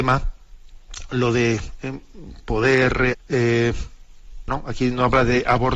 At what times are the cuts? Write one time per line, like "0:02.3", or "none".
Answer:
0:03.1
0:04.5